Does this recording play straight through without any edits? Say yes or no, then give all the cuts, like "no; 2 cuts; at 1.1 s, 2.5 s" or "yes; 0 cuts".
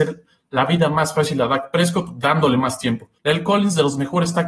no; 1 cut; at 3.2 s